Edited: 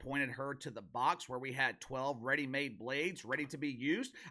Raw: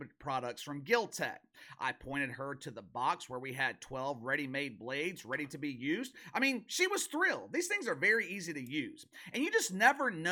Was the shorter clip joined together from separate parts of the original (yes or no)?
no